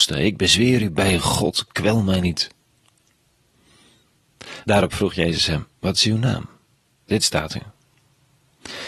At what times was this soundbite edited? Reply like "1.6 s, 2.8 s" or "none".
4.6 s, 7.1 s

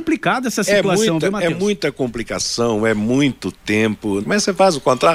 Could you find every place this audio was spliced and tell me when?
4.2 s

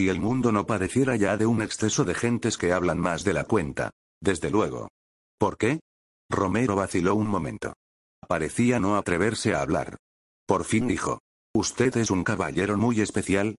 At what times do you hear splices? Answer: 4.1 s

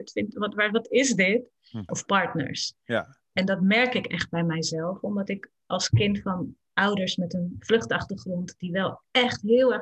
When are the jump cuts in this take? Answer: 1.9 s

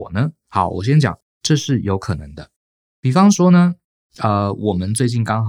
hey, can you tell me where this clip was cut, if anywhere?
2.9 s

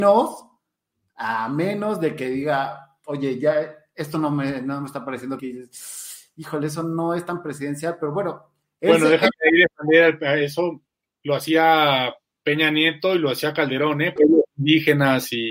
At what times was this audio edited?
5.4 s, 14.2 s

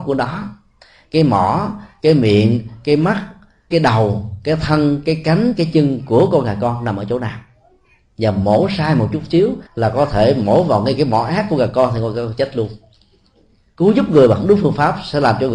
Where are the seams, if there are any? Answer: 3.7 s, 9.7 s

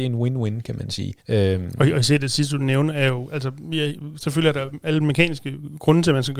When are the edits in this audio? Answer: 1.2 s

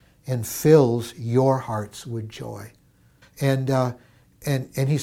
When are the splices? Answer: 3.2 s

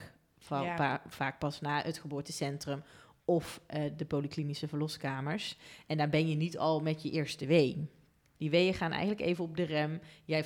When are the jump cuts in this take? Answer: 8.4 s

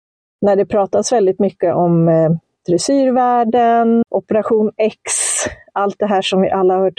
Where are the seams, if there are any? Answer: 4.0 s

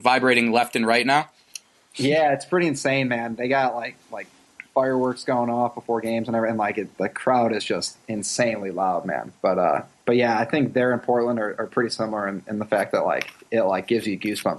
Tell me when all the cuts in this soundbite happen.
none

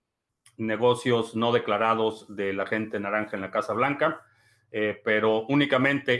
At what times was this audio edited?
none

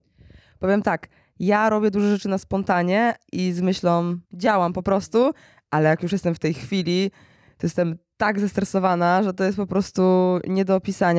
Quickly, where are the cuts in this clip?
4.2 s

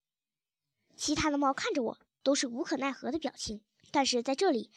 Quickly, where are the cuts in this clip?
3.8 s

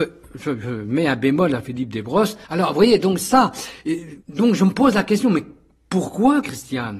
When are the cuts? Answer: 2.4 s, 4.2 s

